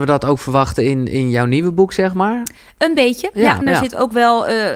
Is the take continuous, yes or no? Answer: no